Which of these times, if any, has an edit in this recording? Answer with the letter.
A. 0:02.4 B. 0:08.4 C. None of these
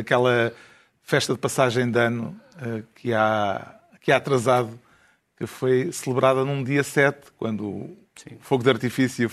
C